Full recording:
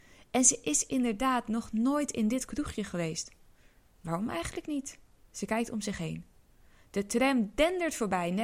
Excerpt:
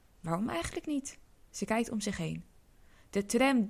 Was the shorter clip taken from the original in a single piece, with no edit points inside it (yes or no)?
yes